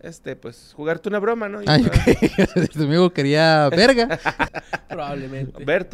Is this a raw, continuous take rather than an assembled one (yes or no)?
no